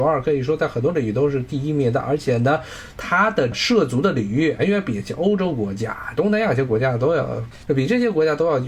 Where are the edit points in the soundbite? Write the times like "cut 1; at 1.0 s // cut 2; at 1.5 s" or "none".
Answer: cut 1; at 4.6 s // cut 2; at 6.1 s